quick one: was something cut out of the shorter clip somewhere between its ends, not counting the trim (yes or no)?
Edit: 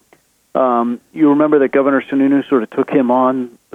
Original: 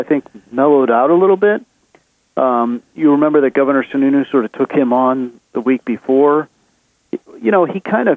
no